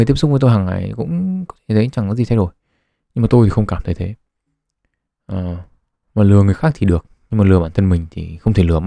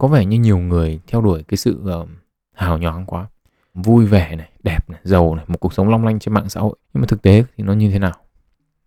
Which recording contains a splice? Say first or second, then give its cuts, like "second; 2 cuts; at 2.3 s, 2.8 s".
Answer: second; 2 cuts; at 3.7 s, 6.8 s